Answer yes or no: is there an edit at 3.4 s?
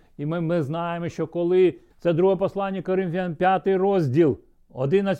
no